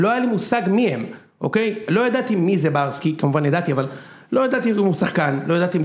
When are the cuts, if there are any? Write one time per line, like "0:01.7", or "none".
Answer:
none